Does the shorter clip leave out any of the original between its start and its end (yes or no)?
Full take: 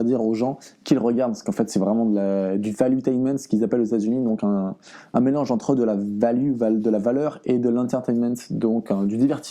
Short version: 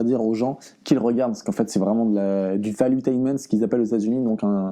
no